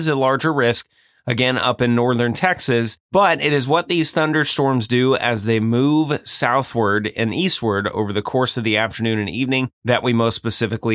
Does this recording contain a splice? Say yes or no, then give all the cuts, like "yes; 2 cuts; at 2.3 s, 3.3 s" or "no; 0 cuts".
no; 0 cuts